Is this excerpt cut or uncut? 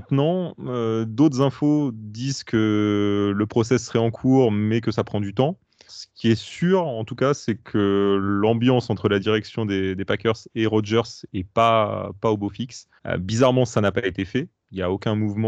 cut